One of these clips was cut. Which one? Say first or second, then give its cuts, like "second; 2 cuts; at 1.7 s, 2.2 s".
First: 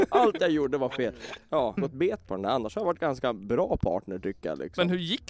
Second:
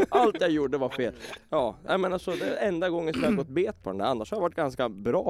first; 1 cut; at 1.8 s